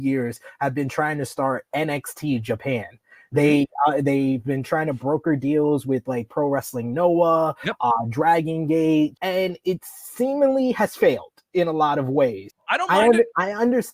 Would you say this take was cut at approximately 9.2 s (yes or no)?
yes